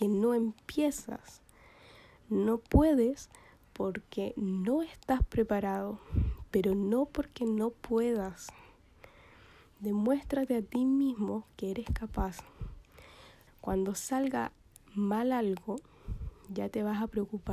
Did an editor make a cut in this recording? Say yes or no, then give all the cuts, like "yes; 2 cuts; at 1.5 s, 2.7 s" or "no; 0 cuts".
yes; 1 cut; at 13.5 s